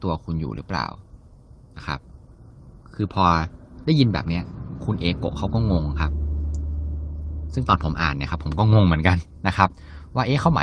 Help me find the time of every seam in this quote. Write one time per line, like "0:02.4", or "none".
none

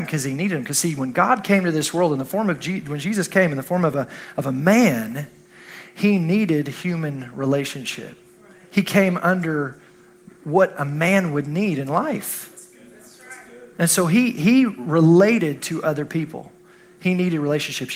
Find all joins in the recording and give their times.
none

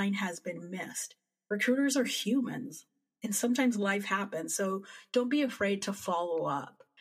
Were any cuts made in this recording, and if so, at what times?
none

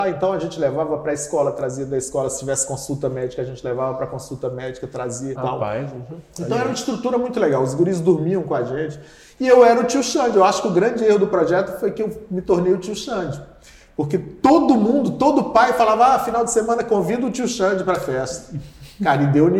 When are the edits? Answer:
0:05.4

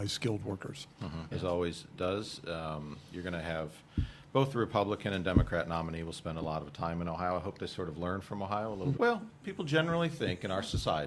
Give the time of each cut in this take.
0:01.3
0:08.9

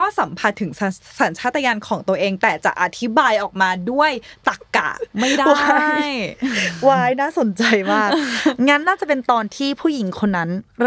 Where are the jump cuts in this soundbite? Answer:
0:08.8

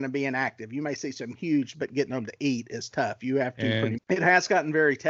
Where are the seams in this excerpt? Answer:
0:01.7
0:04.0

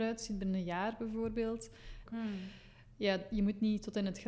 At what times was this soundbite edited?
0:02.1

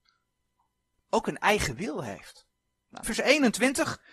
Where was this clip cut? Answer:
0:03.0

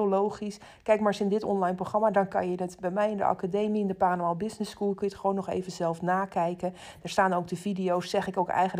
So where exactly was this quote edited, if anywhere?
none

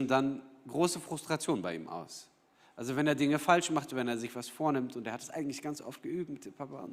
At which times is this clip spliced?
none

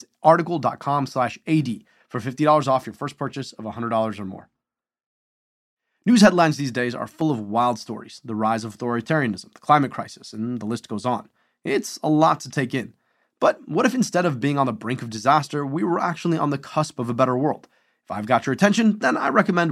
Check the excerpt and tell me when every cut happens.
none

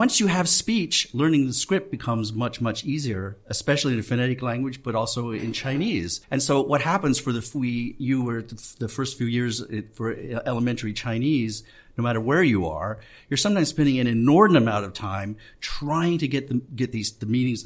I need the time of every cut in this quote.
0:06.2

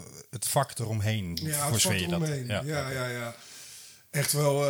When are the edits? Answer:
none

